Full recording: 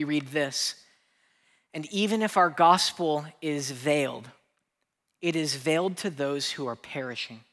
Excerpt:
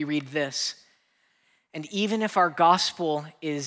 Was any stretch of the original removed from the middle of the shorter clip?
no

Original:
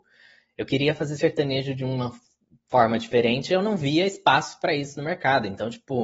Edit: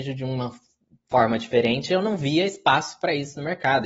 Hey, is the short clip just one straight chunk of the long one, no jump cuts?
yes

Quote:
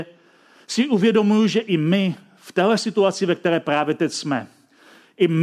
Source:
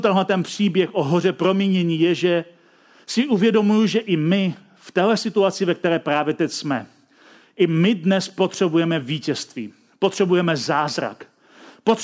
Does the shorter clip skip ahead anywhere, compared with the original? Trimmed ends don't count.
no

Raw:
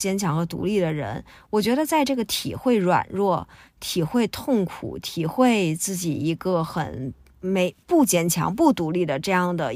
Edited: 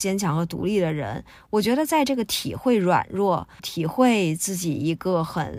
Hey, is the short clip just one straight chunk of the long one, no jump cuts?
no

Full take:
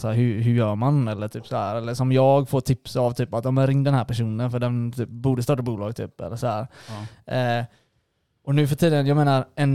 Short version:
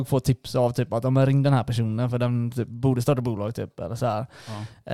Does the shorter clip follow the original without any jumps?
yes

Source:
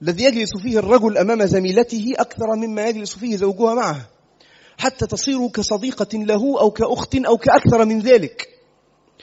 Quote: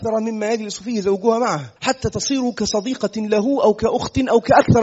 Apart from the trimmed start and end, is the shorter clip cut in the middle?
yes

